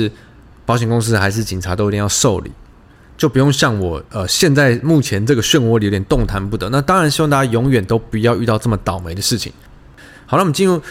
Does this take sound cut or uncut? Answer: uncut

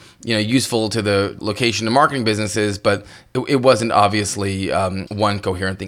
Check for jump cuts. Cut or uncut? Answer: uncut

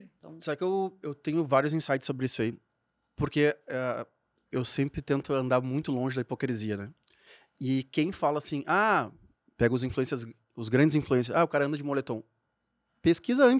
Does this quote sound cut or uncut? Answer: uncut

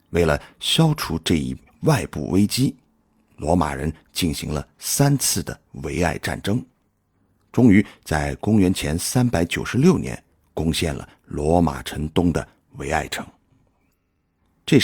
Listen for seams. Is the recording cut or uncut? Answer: uncut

